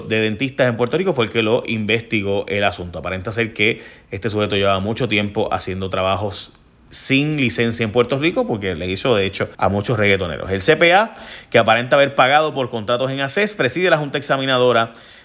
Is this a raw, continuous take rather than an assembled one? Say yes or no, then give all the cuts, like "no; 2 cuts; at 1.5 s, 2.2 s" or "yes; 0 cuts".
no; 1 cut; at 9.5 s